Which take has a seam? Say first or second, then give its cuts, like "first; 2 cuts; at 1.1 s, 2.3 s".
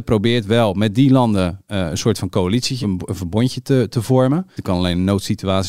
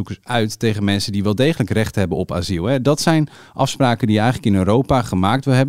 first; 2 cuts; at 2.8 s, 4.6 s